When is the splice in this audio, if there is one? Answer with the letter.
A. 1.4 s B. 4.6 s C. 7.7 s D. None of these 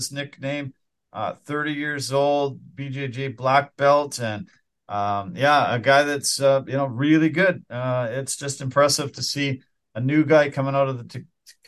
D